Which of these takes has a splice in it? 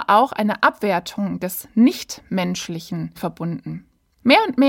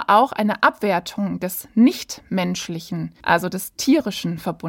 first; 1 cut; at 3.2 s

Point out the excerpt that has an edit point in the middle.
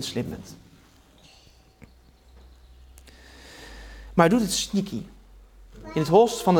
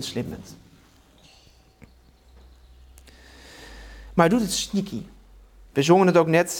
second; 1 cut; at 5.7 s

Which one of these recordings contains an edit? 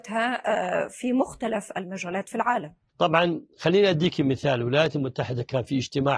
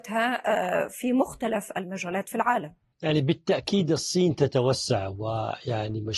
first; 1 cut; at 2.9 s

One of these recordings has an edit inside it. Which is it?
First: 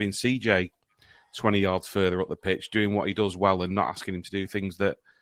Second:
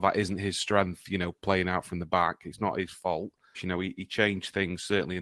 second; 1 cut; at 3.5 s

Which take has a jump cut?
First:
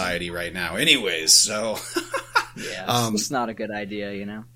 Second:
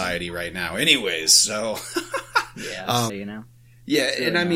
second; 1 cut; at 3.1 s

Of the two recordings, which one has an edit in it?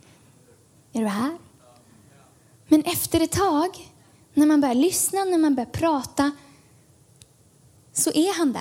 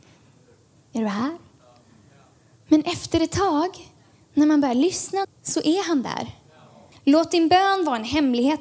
second; 2 cuts; at 5.2 s, 6.9 s

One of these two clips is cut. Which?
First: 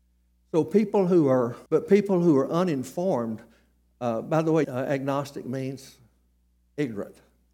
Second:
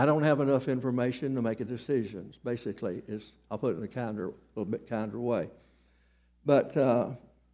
first; 2 cuts; at 1.7 s, 4.6 s

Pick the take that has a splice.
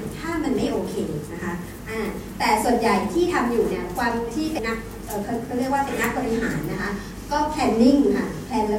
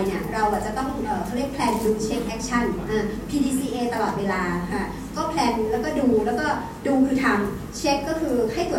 first; 1 cut; at 4.6 s

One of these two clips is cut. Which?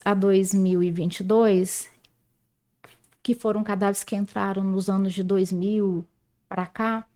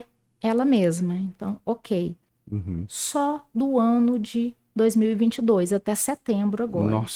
second; 1 cut; at 2.3 s

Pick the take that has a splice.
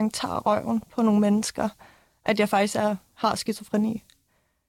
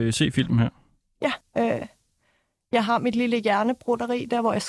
second; 1 cut; at 1.4 s

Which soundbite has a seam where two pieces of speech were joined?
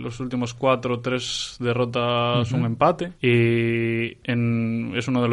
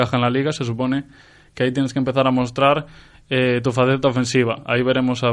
first; 1 cut; at 3.2 s

